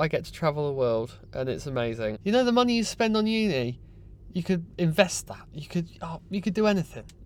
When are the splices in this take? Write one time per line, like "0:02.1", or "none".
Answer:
0:02.1